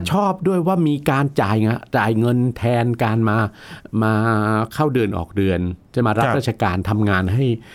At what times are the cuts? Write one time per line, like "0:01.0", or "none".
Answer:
0:06.0